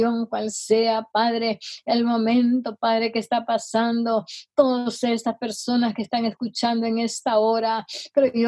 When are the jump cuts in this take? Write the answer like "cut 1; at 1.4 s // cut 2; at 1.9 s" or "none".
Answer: none